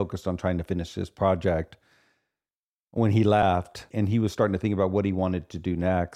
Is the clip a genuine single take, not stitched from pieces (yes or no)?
no